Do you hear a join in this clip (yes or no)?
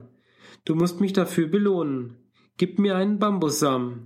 no